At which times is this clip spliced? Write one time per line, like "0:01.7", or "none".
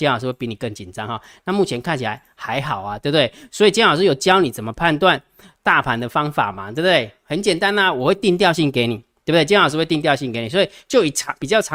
none